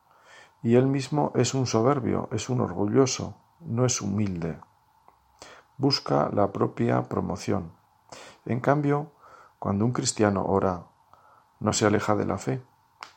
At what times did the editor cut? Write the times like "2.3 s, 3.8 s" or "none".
3.6 s